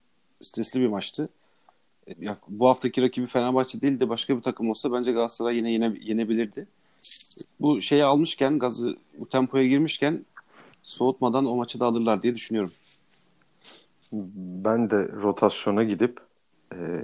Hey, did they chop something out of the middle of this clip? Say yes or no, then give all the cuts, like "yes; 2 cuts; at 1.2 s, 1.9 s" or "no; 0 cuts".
yes; 2 cuts; at 2.1 s, 7.4 s